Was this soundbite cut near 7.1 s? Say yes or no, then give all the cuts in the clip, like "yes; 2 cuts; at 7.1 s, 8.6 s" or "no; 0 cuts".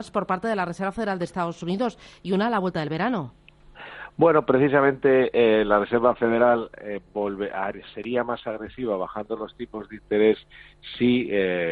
no; 0 cuts